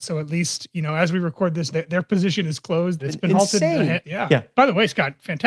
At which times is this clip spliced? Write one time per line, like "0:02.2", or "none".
0:01.7
0:03.0
0:04.0